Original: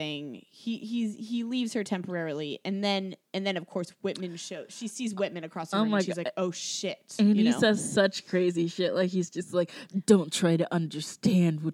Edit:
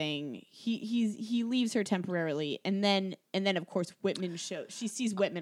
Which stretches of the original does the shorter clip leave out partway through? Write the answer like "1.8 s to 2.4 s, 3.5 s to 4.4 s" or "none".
none